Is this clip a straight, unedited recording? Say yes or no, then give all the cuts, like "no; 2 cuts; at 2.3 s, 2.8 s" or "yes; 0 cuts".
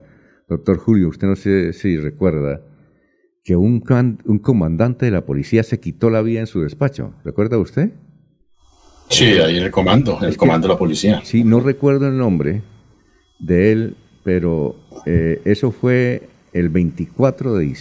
yes; 0 cuts